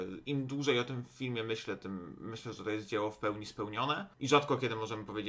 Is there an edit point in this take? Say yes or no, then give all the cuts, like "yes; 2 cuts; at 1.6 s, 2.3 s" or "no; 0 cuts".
yes; 1 cut; at 4.1 s